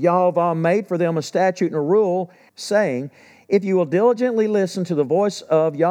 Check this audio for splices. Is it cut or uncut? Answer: cut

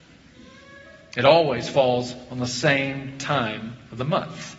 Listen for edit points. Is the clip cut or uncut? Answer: uncut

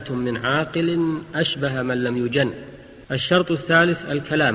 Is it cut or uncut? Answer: cut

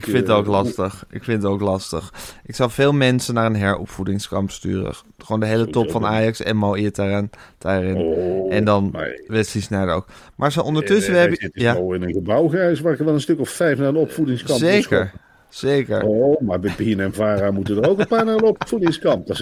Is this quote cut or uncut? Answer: uncut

